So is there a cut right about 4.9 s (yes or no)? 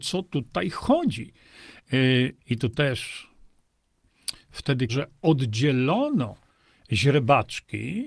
yes